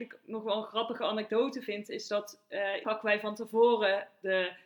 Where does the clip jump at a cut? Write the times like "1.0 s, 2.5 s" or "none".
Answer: 2.8 s

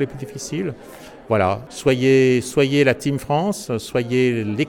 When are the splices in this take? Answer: none

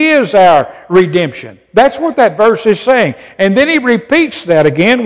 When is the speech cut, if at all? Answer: none

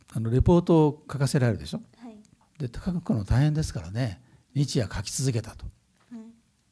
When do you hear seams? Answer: 2.4 s

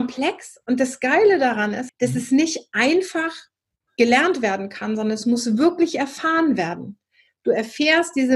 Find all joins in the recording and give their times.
1.9 s

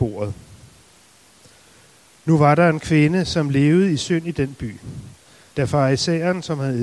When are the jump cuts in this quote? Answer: 5.5 s

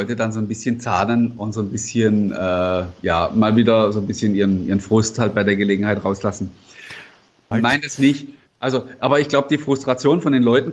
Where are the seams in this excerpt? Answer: 7.5 s

